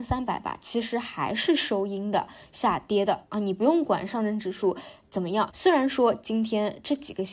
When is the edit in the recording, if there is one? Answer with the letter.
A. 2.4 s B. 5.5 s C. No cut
B